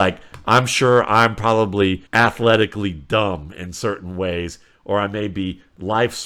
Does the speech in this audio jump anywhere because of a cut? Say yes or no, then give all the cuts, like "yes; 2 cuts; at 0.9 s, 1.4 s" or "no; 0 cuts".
yes; 2 cuts; at 2.1 s, 4.7 s